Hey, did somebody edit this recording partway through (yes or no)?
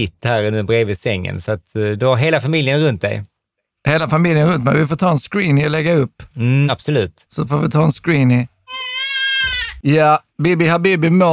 yes